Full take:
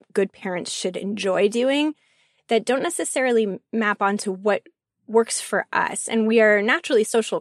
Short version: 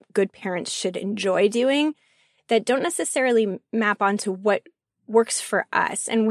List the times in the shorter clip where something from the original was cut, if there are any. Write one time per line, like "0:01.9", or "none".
none

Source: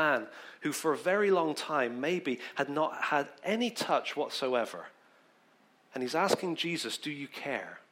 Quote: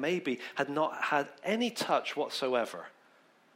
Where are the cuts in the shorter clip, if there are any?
none

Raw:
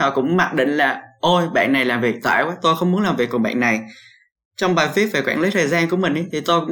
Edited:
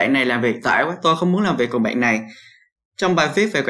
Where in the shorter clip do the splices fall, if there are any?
none

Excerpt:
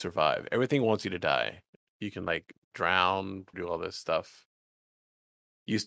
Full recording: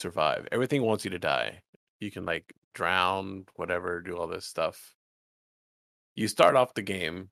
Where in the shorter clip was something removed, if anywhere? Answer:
0:03.5

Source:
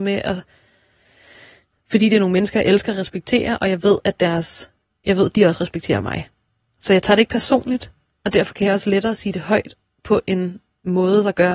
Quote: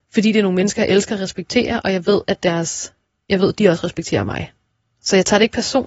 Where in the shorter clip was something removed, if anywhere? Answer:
none

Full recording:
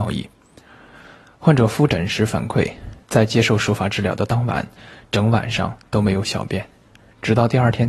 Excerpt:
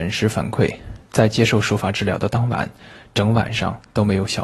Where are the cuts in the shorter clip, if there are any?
none

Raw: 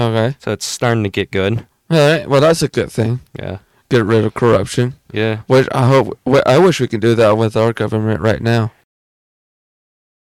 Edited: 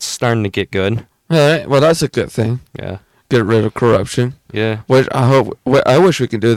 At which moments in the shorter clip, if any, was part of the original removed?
none

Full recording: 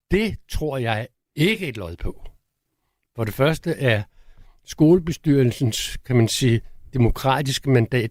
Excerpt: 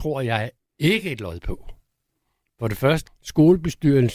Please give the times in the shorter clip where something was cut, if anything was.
0:03.1

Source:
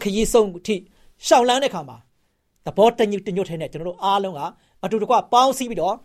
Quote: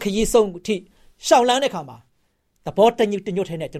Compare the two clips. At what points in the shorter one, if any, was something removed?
none

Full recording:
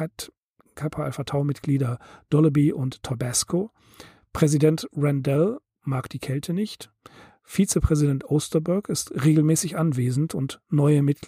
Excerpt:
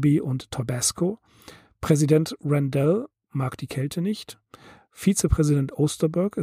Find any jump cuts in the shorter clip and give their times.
none

